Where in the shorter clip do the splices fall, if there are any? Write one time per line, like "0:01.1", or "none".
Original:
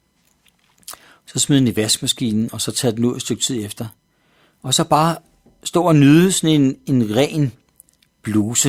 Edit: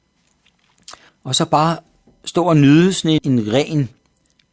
0:01.1
0:03.2